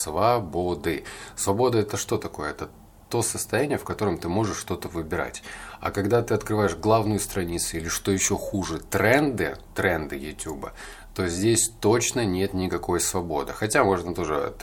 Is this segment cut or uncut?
uncut